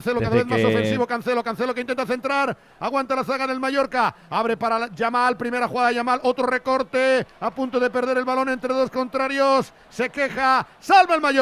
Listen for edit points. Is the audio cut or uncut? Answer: uncut